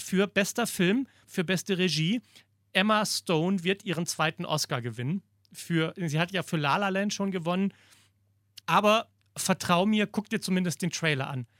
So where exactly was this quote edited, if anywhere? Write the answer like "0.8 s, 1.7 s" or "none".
1.2 s, 8.6 s